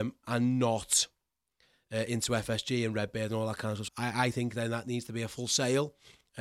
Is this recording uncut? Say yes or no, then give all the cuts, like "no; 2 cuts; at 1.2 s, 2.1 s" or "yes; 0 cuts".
no; 1 cut; at 3.9 s